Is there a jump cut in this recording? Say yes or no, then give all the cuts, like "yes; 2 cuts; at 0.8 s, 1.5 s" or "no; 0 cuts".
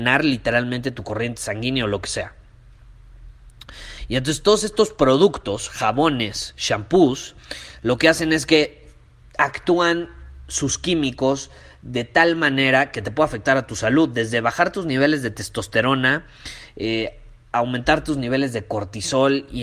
no; 0 cuts